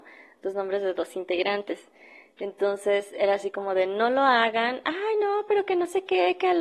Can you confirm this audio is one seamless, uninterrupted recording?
yes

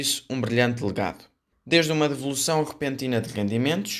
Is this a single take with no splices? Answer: no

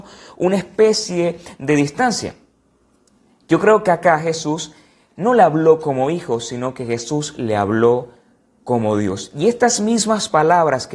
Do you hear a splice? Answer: no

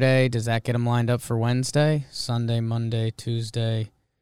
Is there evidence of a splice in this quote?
no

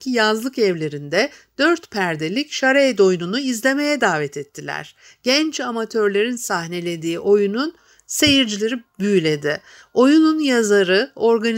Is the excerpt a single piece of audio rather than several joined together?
yes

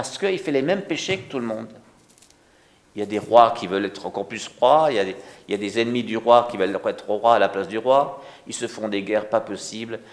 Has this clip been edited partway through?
no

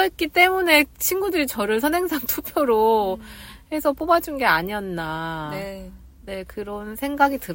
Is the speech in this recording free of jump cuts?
yes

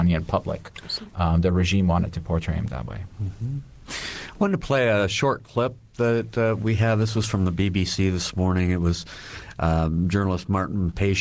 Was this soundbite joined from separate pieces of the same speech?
no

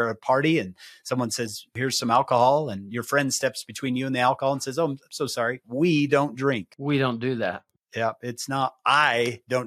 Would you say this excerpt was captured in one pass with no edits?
yes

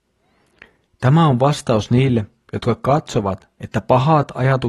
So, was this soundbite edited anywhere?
no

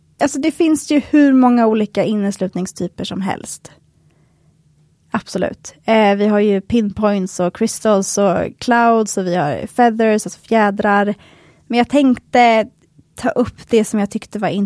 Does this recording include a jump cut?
no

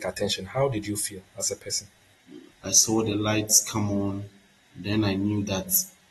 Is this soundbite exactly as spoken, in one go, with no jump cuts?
no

